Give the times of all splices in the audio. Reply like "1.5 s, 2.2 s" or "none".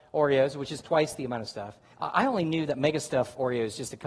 1.9 s

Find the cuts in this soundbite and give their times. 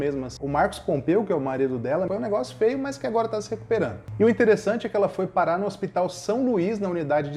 2.1 s

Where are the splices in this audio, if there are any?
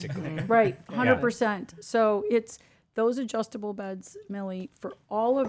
none

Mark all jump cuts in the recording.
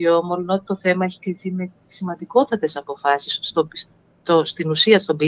none

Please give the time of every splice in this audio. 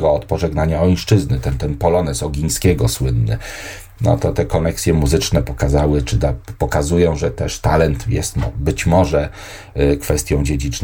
1.6 s

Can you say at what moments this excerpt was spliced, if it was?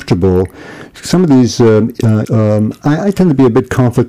2.2 s

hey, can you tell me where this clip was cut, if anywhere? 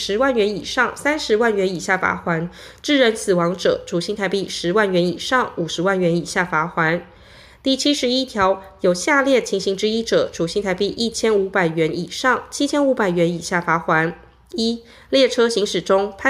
none

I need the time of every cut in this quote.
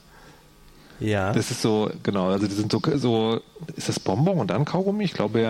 none

